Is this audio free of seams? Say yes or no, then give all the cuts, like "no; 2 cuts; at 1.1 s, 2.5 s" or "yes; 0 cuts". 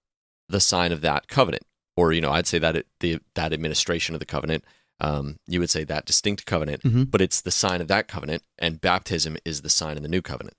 yes; 0 cuts